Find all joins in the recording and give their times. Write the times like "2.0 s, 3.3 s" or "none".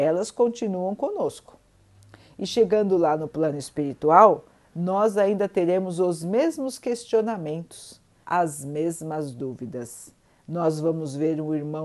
8.2 s